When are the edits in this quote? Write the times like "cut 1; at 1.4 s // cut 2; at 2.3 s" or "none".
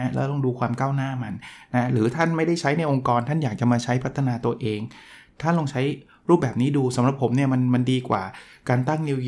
none